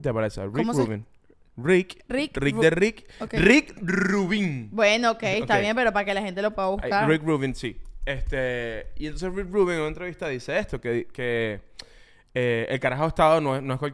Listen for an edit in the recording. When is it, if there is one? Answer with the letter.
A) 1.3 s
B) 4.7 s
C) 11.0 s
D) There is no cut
D